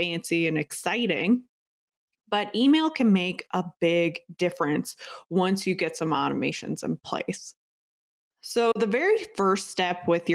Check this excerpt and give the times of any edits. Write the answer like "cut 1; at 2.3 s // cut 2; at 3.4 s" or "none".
none